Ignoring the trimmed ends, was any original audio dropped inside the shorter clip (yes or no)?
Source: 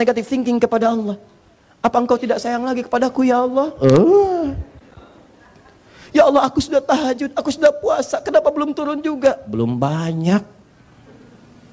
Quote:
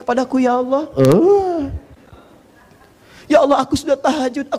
no